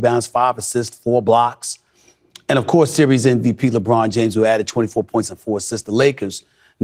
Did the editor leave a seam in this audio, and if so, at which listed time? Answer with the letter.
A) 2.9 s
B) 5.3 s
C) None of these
B